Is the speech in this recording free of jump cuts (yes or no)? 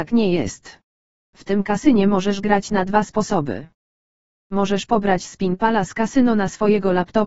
no